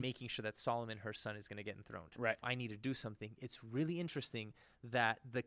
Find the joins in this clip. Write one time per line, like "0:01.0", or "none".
0:02.4